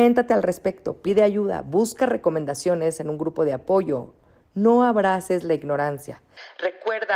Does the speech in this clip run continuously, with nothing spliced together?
yes; 0 cuts

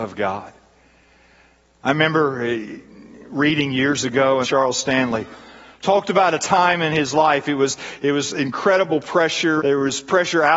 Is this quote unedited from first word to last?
no; 2 cuts; at 4.4 s, 9.6 s

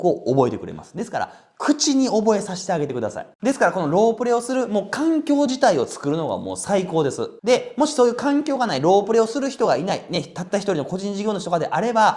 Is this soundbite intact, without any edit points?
no; 2 cuts; at 3.3 s, 7.4 s

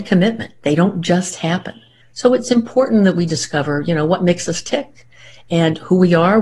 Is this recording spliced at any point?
yes; 1 cut; at 2.0 s

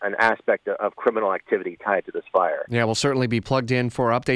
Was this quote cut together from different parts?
no; 0 cuts

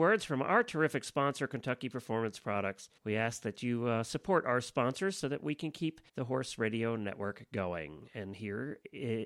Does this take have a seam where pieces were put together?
yes; 2 cuts; at 3.0 s, 6.1 s

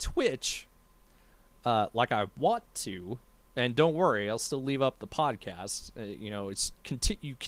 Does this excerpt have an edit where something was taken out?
no; 0 cuts

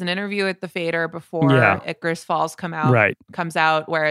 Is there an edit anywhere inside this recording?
no; 0 cuts

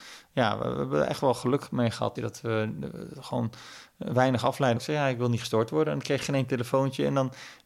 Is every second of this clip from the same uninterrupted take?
no; 2 cuts; at 2.2 s, 4.8 s

